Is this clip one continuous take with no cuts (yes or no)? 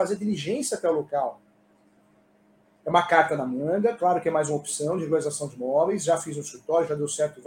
no